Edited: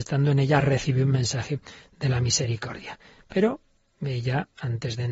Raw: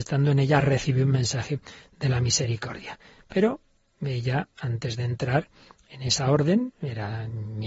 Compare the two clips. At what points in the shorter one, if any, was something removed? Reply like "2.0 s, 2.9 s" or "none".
none